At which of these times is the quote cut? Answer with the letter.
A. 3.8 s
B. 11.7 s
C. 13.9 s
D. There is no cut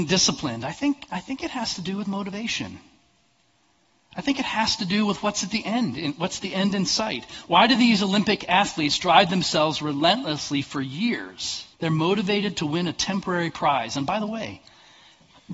B